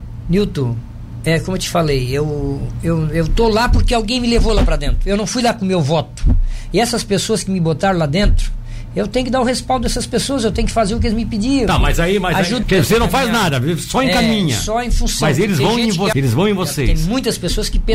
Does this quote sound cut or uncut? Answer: cut